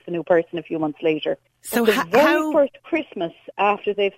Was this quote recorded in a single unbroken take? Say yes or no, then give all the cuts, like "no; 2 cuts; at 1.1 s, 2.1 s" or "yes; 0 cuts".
no; 1 cut; at 1.5 s